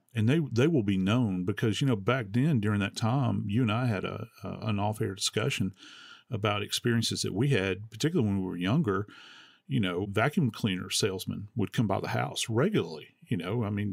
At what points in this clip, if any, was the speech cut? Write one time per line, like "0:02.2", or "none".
none